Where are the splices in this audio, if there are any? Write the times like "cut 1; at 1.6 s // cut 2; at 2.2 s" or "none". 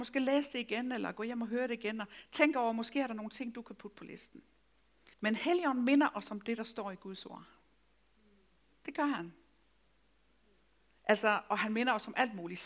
cut 1; at 5.1 s